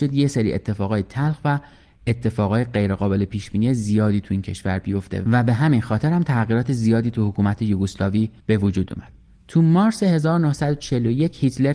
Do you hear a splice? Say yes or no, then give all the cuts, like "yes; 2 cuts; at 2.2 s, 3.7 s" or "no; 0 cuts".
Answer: yes; 1 cut; at 8.4 s